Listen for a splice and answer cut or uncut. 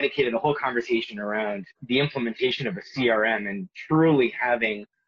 cut